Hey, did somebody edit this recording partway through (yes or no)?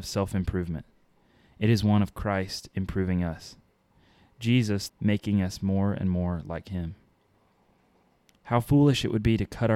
yes